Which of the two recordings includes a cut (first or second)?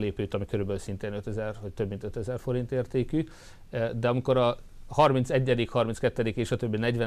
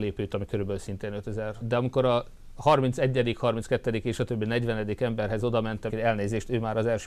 second